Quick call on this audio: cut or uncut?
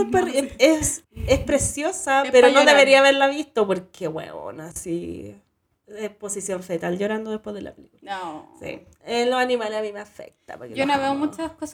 uncut